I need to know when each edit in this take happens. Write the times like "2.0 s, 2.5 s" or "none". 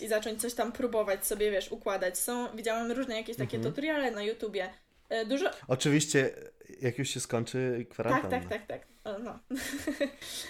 4.1 s